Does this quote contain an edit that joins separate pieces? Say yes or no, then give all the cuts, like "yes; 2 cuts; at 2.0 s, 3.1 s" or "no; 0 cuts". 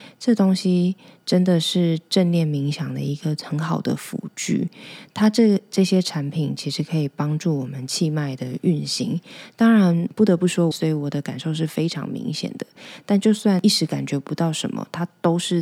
yes; 1 cut; at 10.7 s